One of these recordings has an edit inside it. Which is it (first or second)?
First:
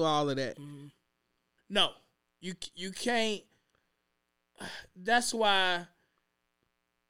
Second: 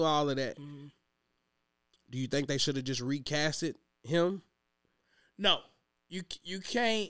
first